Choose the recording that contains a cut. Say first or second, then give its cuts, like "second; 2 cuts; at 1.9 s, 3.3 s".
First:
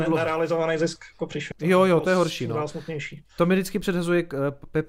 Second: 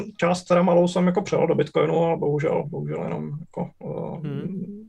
first; 1 cut; at 1.5 s